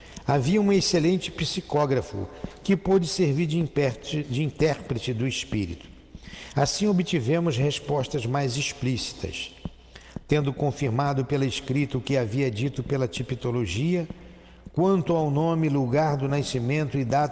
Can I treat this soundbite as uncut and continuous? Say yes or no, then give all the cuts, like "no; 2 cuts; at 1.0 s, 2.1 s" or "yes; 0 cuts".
yes; 0 cuts